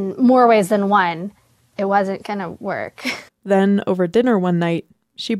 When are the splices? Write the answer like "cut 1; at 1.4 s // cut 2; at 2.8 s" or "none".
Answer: cut 1; at 3.3 s